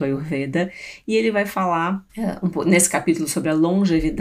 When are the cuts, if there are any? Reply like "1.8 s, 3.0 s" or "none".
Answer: 2.1 s